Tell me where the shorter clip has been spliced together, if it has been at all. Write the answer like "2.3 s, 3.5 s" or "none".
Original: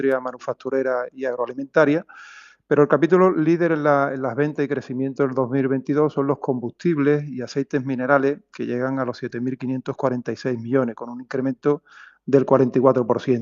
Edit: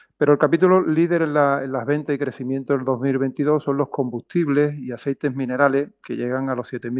none